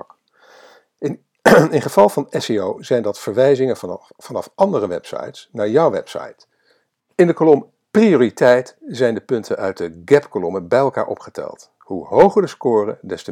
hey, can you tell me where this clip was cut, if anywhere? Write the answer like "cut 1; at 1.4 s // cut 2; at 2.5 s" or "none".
cut 1; at 7.0 s